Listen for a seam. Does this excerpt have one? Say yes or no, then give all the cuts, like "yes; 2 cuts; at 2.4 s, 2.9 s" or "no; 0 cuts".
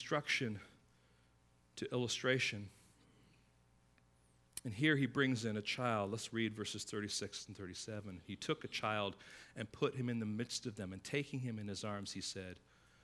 no; 0 cuts